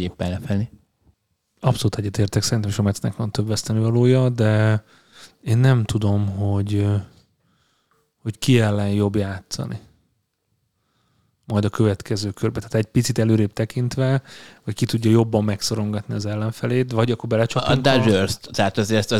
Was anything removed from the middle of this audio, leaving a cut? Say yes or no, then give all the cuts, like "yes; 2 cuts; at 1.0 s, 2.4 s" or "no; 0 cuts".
no; 0 cuts